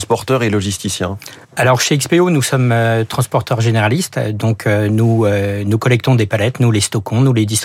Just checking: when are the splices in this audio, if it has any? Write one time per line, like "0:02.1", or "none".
0:01.4